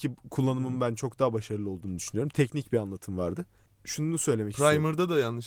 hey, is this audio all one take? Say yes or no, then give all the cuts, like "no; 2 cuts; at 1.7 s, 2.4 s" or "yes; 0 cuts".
yes; 0 cuts